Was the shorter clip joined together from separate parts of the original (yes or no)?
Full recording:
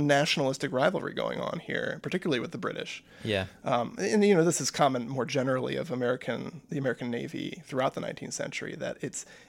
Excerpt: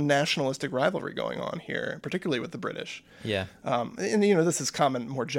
no